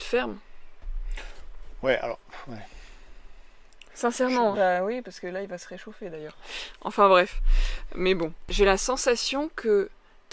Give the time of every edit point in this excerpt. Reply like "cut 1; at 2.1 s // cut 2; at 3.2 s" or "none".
cut 1; at 4.5 s

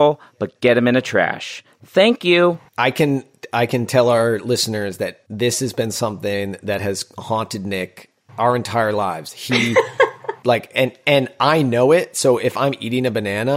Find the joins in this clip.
cut 1; at 2.7 s

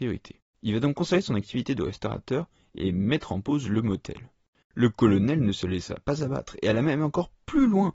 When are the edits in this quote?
cut 1; at 4.6 s

